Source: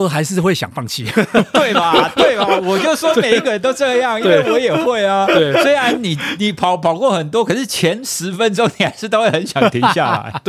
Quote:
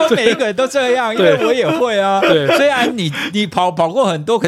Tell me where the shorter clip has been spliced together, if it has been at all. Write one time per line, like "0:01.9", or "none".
none